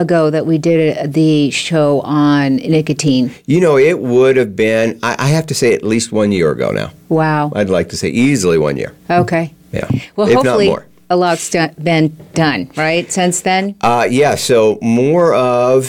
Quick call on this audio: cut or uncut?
uncut